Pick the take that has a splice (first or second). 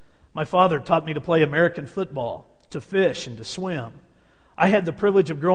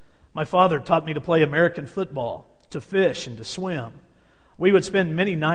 second